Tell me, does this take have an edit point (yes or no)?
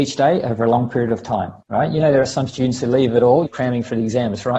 yes